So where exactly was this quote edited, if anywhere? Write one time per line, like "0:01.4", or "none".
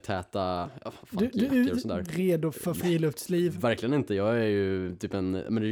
0:02.0